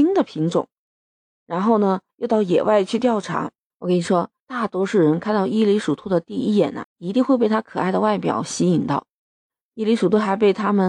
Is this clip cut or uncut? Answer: cut